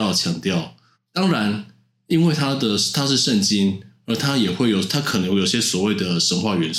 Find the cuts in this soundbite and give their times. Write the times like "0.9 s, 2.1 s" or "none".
0.9 s

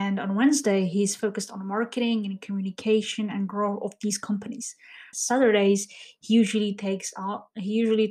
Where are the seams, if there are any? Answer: 5.1 s

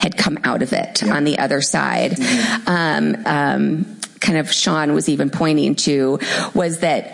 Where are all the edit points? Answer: 2.2 s, 3.2 s

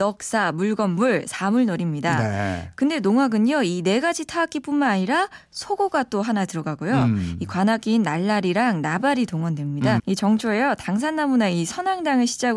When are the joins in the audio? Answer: 10.0 s

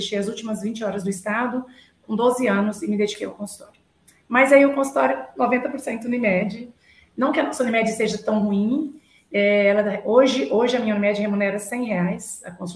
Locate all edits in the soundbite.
none

